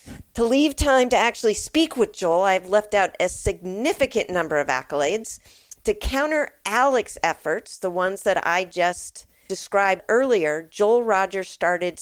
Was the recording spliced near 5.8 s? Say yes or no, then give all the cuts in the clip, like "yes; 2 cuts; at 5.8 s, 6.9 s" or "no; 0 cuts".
yes; 1 cut; at 5.8 s